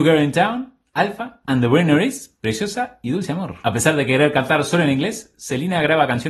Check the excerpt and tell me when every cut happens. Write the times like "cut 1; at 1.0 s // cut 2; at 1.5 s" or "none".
cut 1; at 1.4 s // cut 2; at 3.6 s